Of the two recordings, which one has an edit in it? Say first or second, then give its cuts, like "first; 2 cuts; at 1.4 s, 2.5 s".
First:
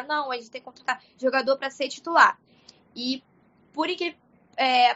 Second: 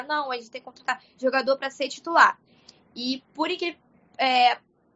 second; 1 cut; at 3.3 s